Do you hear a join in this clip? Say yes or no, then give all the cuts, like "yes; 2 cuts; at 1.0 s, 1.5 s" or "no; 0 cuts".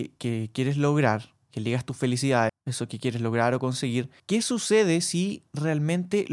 yes; 2 cuts; at 2.5 s, 4.2 s